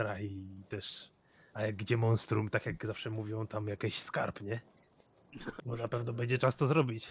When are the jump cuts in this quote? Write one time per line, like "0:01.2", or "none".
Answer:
0:01.5
0:05.6